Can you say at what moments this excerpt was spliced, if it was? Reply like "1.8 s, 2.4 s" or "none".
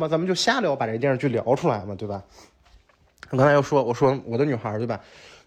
none

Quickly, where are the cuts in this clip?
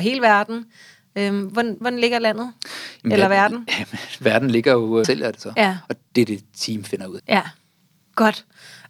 1.8 s, 5.0 s, 7.2 s

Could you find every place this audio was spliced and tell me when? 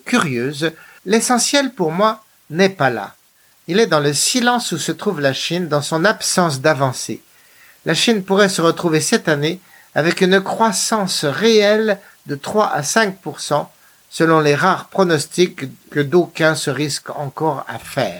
1.0 s

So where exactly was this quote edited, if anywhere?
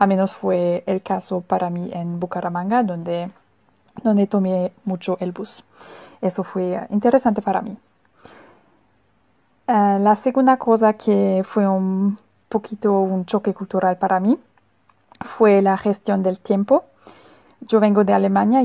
none

